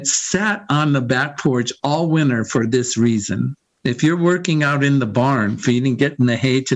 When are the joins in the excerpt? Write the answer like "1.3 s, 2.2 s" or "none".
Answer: 3.8 s